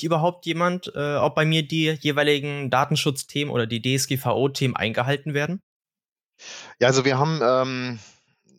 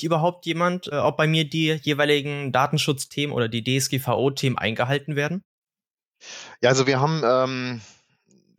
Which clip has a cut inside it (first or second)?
second